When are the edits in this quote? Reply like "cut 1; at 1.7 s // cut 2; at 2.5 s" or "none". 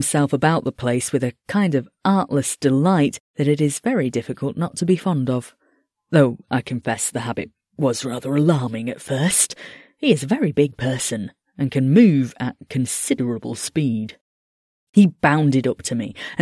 none

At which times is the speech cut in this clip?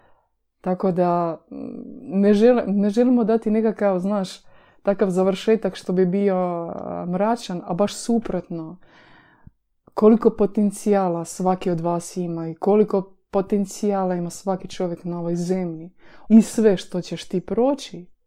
cut 1; at 16.3 s

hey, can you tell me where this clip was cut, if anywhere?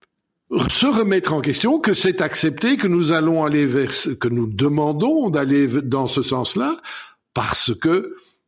none

